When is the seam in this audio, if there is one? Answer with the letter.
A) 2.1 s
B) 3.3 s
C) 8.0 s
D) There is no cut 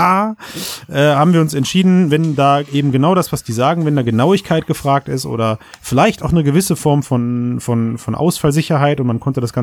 D